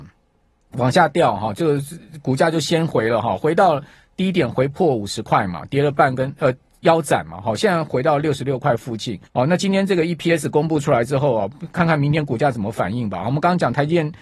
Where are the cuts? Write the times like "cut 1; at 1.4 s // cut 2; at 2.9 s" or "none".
cut 1; at 9.3 s